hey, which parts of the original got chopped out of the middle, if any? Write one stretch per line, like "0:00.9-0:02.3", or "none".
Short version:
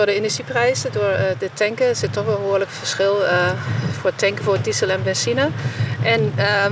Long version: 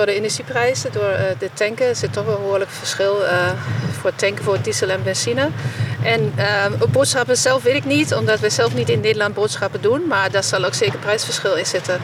none

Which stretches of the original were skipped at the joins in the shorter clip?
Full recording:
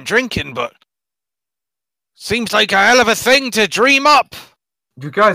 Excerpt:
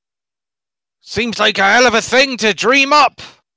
none

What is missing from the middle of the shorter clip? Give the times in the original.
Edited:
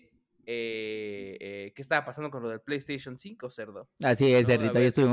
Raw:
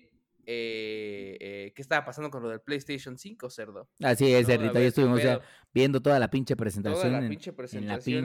none

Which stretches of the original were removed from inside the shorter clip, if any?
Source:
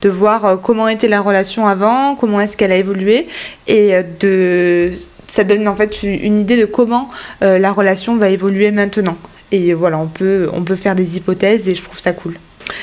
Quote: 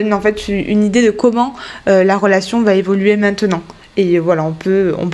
none

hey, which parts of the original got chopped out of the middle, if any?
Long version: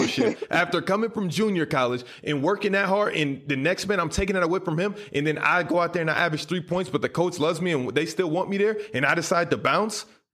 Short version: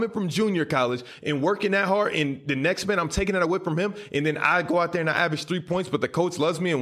none

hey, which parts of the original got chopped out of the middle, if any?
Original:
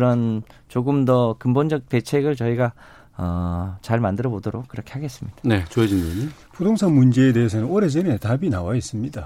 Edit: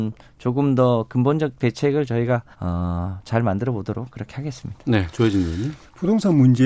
0:02.8-0:03.1

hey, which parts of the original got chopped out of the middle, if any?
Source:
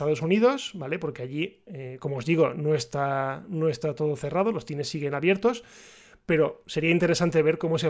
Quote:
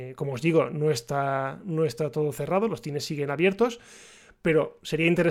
none

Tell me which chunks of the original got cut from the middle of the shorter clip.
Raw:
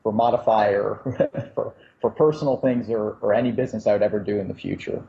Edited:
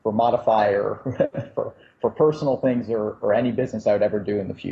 none

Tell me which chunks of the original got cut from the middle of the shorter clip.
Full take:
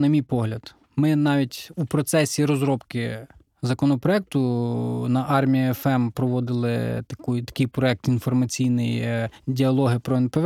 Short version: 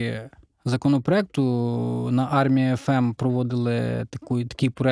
none

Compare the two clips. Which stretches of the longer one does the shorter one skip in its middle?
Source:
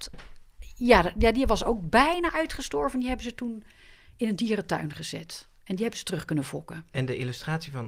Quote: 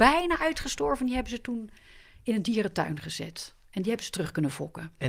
none

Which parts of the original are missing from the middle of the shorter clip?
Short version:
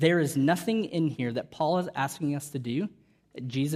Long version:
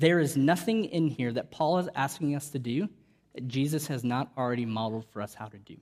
none

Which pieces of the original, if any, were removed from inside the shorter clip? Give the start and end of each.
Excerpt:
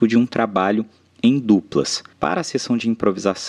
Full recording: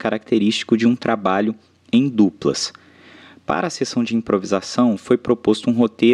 0:02.8-0:03.4

